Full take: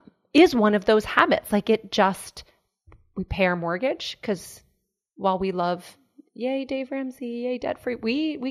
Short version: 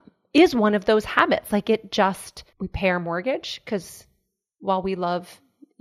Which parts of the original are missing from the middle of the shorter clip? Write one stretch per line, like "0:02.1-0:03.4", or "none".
0:02.5-0:03.1

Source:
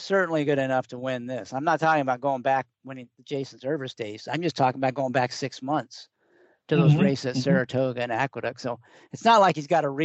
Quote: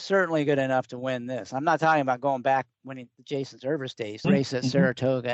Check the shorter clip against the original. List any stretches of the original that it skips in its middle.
0:04.2-0:07.0

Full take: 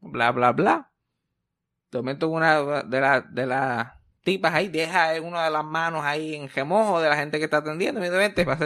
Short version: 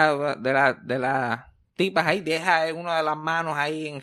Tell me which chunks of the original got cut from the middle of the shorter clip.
none

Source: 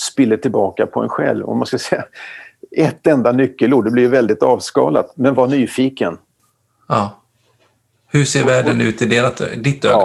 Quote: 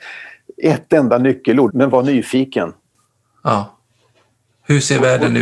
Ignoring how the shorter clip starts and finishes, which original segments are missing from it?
0:03.8-0:05.1

